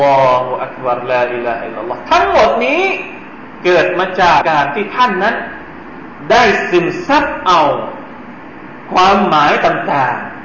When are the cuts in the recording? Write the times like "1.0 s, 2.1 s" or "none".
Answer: 4.4 s

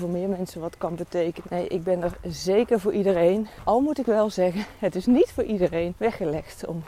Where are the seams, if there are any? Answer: 1.4 s

